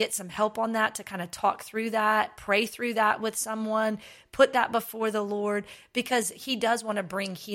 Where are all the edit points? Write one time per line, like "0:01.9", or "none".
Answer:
none